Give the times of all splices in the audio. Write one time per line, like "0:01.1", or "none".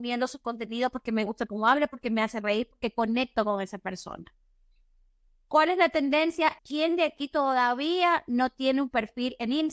0:06.6